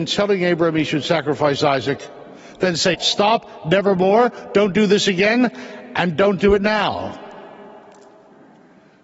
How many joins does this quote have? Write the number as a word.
one